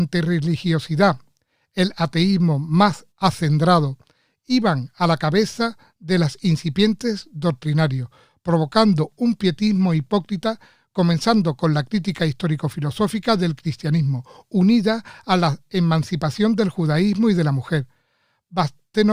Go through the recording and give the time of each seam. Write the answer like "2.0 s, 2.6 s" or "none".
3.1 s